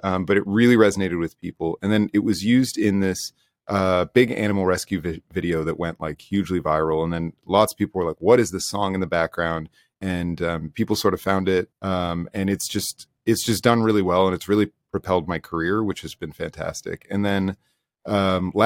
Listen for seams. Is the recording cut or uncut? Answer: cut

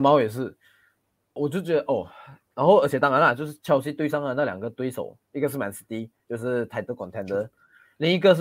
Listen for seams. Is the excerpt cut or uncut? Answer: cut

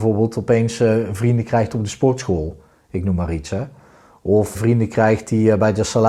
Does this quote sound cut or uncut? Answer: cut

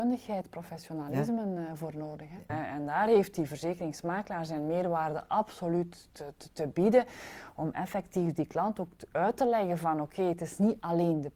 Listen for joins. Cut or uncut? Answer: cut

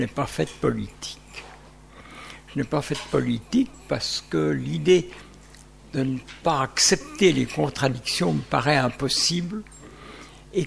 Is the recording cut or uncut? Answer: uncut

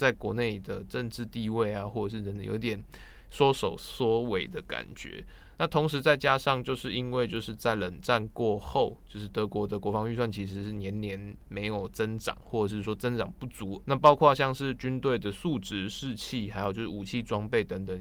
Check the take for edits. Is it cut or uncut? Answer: uncut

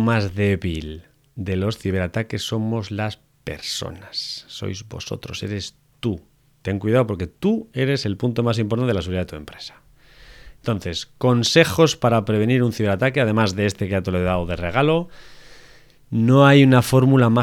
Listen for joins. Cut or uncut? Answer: uncut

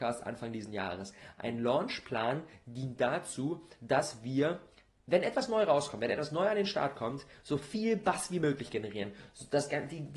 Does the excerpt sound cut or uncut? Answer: uncut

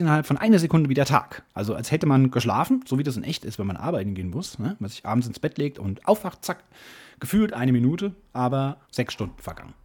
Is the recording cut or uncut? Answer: cut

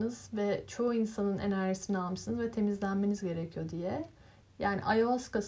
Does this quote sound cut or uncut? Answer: cut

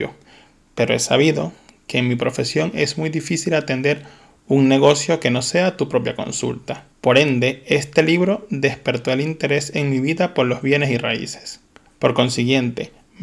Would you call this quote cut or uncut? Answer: cut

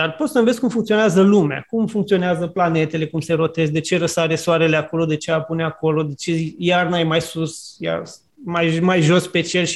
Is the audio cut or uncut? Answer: uncut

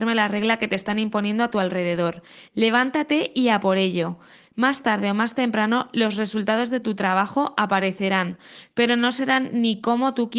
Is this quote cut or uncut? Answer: uncut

